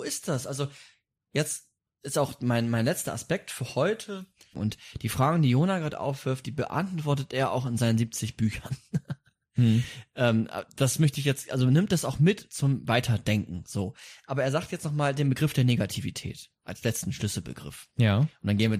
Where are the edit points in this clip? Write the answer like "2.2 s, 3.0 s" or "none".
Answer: 4.5 s